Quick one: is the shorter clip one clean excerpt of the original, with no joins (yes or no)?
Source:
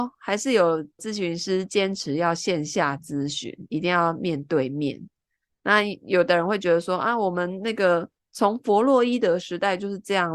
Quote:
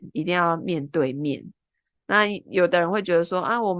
yes